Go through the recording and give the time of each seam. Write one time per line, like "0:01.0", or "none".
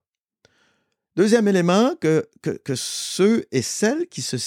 none